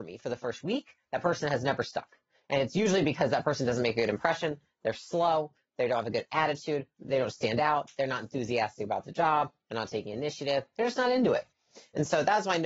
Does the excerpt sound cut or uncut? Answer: uncut